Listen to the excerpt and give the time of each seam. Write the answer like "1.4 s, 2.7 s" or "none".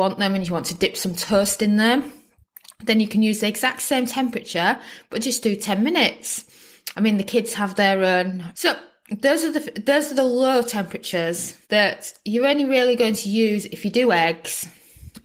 6.9 s, 8.5 s, 11.6 s